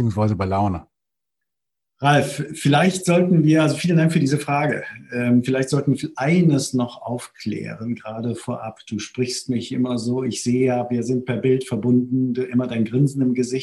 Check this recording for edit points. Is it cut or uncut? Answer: uncut